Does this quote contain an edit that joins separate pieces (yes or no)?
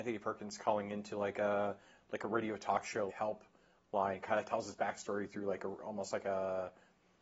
yes